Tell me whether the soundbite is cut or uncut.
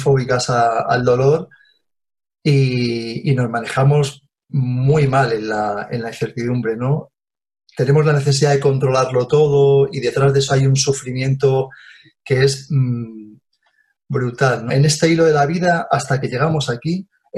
cut